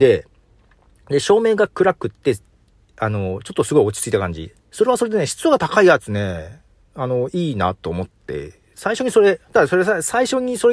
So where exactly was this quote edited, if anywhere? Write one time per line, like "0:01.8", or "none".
0:09.5